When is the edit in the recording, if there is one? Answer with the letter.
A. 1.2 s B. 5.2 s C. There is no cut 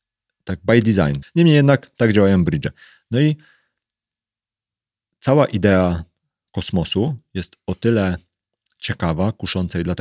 A